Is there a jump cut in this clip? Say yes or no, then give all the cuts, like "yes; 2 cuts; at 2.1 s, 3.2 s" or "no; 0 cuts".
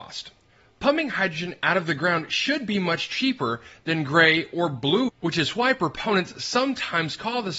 yes; 1 cut; at 5.1 s